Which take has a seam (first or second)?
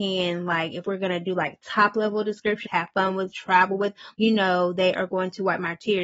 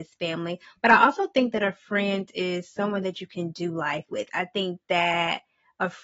first